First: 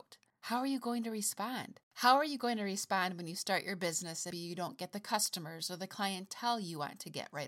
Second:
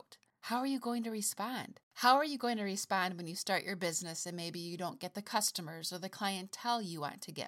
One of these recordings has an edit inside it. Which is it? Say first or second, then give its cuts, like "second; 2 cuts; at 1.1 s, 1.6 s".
first; 1 cut; at 4.3 s